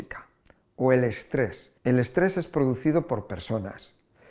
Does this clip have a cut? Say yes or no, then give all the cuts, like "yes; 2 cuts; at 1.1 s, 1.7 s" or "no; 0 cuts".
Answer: yes; 1 cut; at 1.8 s